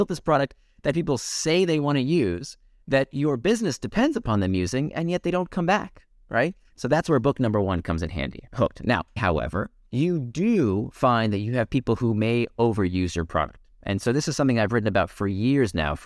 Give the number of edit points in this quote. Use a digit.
1